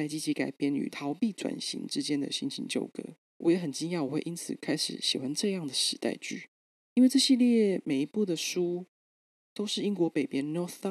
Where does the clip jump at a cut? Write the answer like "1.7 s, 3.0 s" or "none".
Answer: 6.7 s